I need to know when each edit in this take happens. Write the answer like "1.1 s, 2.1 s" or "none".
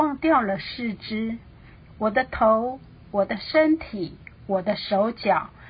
none